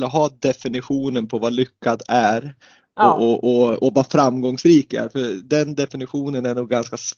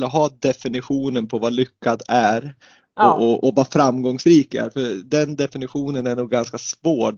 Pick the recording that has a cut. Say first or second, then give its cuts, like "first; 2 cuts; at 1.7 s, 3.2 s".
second; 1 cut; at 3.4 s